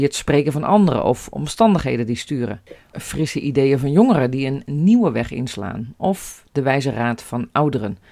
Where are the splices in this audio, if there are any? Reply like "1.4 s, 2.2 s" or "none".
2.9 s